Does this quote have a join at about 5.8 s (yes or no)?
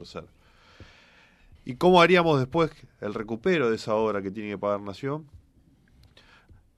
no